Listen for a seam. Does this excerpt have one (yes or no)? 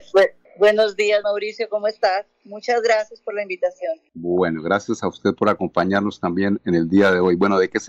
no